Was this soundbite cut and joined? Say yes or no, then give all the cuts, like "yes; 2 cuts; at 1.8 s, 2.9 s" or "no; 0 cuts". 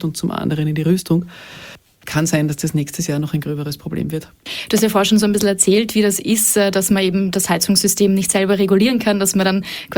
no; 0 cuts